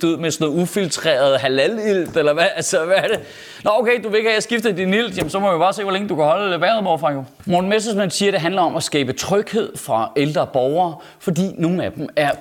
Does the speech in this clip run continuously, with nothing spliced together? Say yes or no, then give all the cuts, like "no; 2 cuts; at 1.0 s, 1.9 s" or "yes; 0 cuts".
yes; 0 cuts